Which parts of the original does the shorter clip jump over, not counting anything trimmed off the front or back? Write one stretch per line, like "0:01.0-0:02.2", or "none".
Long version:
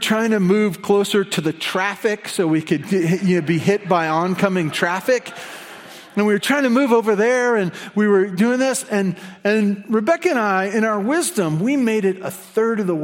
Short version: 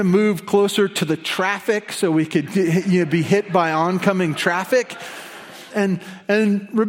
0:06.1-0:08.9